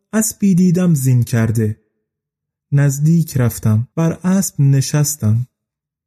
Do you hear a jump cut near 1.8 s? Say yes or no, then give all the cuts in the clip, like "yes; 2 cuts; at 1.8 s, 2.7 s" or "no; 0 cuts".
no; 1 cut; at 3.9 s